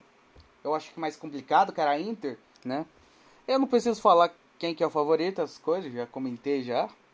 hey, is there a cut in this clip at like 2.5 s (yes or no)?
yes